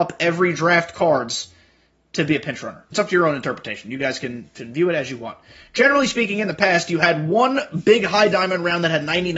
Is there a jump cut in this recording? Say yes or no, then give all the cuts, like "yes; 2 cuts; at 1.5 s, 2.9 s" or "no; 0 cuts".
yes; 1 cut; at 2.9 s